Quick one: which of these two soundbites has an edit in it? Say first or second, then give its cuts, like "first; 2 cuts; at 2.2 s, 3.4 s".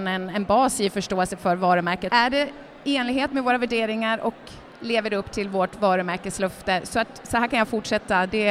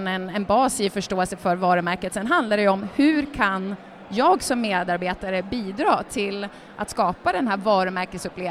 first; 1 cut; at 2.1 s